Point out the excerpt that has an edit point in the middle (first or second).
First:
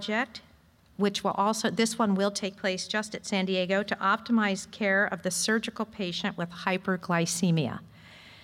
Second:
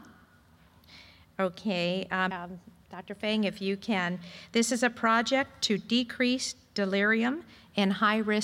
second